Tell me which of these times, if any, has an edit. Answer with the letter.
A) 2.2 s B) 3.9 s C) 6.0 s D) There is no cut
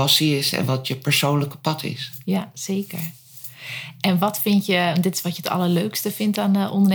D